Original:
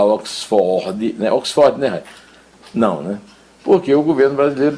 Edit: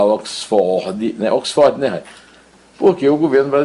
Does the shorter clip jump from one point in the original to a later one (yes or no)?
yes